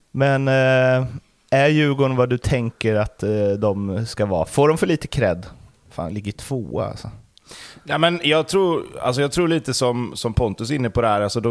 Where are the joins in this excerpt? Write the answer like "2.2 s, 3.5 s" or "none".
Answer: none